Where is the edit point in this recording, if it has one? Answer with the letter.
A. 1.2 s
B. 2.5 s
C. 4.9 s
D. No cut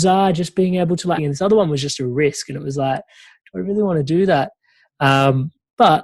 A